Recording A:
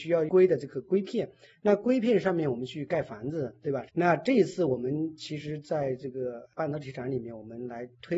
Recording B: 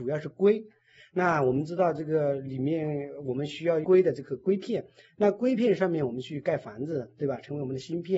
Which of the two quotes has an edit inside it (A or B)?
A